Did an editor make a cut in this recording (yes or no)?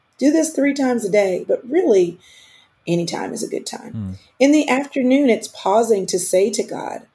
no